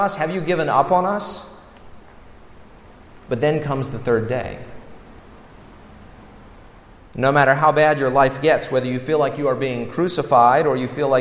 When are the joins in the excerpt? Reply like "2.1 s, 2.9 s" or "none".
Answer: none